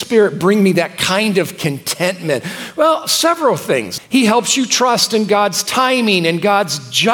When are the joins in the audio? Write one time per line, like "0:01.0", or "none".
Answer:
0:04.0